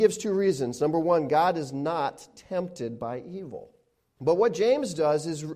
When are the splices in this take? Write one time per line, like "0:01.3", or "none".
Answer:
0:04.2